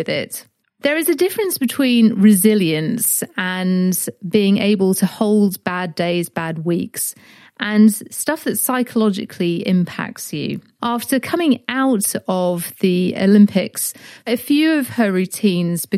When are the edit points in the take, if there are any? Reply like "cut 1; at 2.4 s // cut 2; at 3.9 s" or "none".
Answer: cut 1; at 10.8 s // cut 2; at 14.3 s